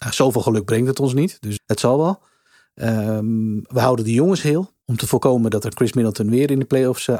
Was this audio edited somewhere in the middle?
yes; 2 cuts; at 1.6 s, 4.8 s

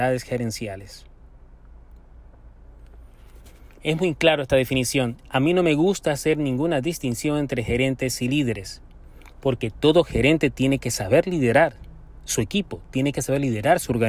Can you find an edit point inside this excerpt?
no; 0 cuts

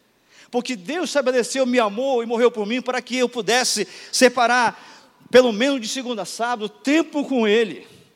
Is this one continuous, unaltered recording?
yes; 0 cuts

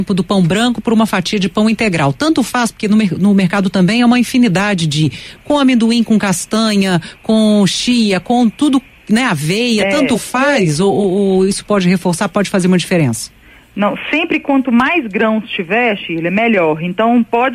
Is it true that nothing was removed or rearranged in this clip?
yes; 0 cuts

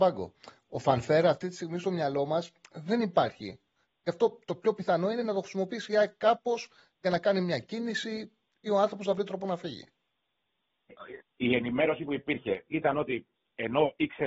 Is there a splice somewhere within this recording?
yes; 2 cuts; at 11.2 s, 12.7 s

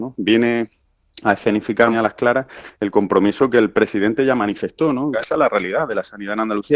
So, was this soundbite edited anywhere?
yes; 2 cuts; at 1.9 s, 5.1 s

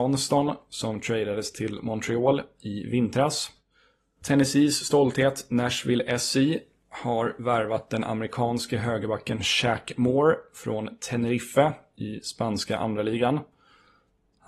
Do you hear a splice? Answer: yes; 1 cut; at 4.2 s

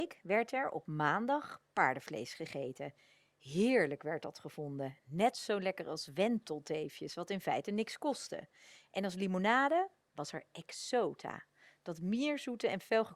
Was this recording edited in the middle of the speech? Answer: no; 0 cuts

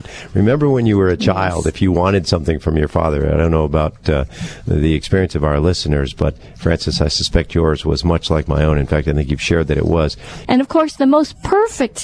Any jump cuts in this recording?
yes; 1 cut; at 10.4 s

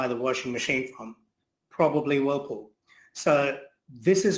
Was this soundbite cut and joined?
no; 0 cuts

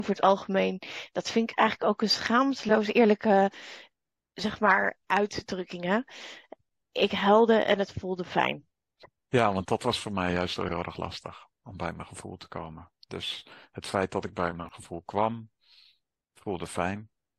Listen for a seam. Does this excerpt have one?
no; 0 cuts

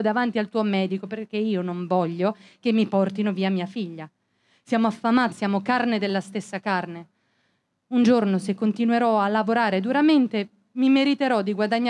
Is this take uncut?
no; 1 cut; at 5.3 s

